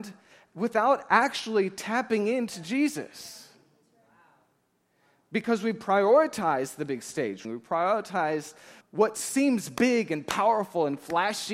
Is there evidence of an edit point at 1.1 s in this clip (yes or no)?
no